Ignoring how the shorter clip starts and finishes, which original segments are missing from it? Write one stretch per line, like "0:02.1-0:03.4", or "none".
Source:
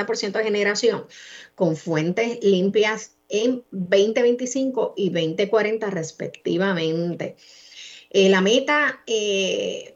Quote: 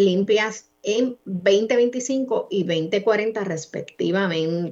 none